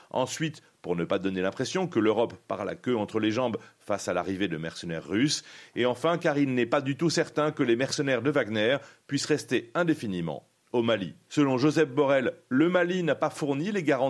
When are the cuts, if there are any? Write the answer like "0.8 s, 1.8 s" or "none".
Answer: 11.3 s